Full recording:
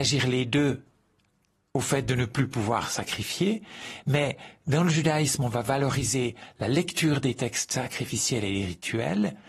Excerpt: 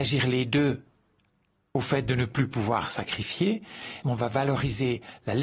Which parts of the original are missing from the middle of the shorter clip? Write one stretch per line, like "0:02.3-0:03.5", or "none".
0:04.0-0:05.4